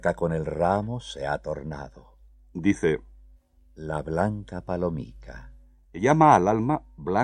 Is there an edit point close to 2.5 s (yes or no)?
yes